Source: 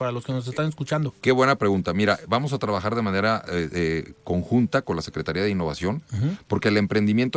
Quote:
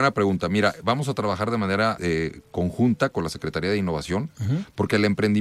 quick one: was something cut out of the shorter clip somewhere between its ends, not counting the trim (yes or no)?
yes